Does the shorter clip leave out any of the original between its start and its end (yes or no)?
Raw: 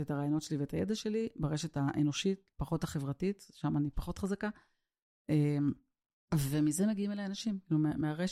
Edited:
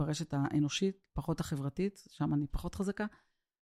no